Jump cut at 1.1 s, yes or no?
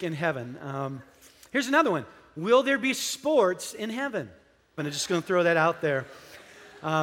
no